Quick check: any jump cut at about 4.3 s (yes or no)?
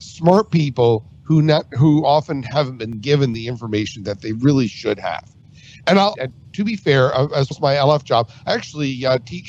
no